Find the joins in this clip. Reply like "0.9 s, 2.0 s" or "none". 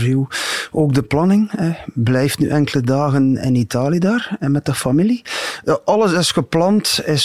none